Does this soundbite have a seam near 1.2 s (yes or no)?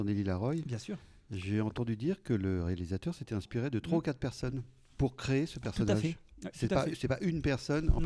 no